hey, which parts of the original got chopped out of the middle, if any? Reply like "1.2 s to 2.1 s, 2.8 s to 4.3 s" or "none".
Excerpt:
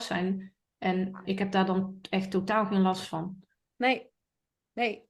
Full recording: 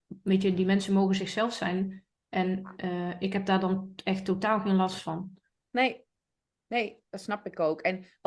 2.8 s to 3.2 s